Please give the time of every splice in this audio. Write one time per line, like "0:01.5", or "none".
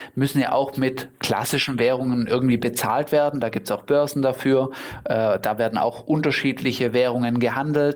none